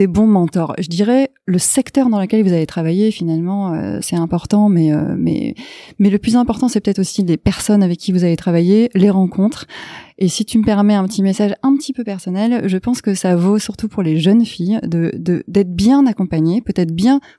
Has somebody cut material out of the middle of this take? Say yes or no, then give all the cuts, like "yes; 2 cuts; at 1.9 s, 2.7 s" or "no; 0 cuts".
no; 0 cuts